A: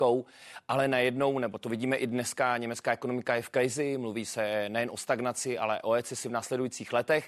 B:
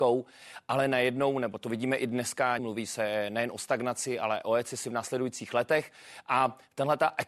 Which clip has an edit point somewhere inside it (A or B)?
B